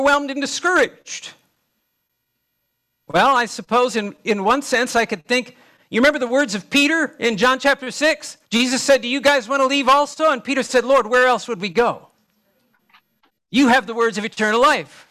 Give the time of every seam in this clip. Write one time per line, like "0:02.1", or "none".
0:08.5